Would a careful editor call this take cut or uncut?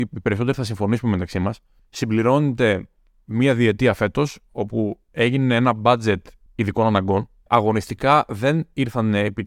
uncut